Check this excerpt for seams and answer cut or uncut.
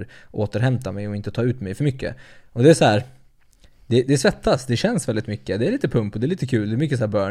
uncut